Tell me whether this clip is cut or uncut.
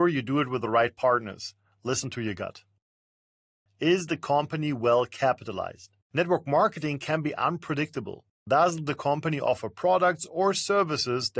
cut